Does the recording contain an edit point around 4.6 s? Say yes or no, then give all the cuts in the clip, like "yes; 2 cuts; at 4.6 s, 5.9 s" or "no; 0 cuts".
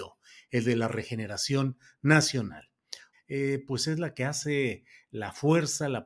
no; 1 cut; at 3.1 s